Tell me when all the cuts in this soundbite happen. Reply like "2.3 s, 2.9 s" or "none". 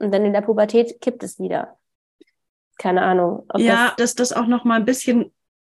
4.0 s